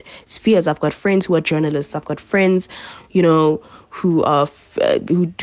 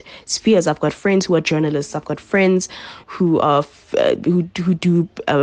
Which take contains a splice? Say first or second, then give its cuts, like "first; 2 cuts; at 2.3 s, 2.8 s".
second; 1 cut; at 3.0 s